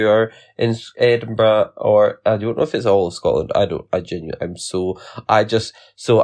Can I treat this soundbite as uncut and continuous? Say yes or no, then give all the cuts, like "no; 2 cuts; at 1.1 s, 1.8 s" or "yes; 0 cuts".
yes; 0 cuts